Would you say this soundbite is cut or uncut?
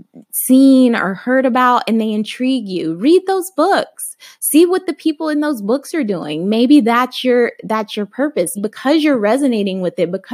cut